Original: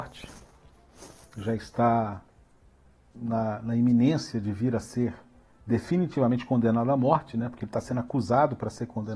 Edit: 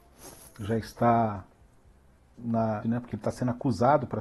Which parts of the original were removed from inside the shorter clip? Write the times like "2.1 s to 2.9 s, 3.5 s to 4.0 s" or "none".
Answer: 3.6 s to 7.3 s